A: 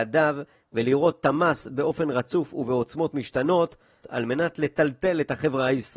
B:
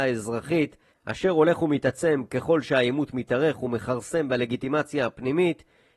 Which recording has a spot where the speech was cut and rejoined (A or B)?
A